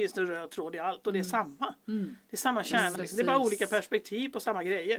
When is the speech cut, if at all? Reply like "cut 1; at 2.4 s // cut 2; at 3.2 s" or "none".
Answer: cut 1; at 3.0 s